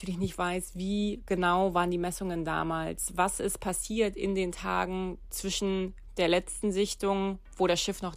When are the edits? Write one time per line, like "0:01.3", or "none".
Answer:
none